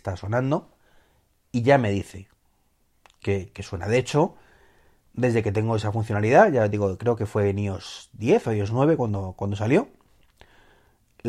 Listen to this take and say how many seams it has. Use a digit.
1